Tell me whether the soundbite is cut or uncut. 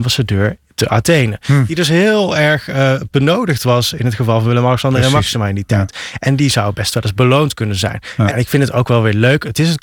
cut